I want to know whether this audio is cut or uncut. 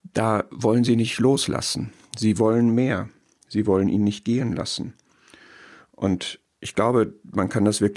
uncut